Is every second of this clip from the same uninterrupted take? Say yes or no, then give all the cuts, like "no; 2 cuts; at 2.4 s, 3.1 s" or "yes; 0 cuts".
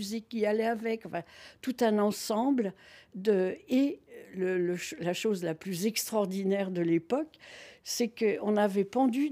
yes; 0 cuts